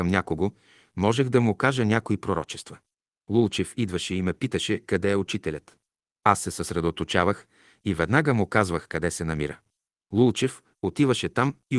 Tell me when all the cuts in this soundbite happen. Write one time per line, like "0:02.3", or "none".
none